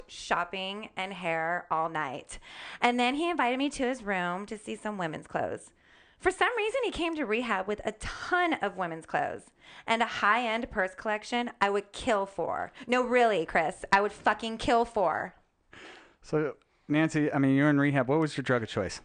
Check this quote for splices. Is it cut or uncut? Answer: uncut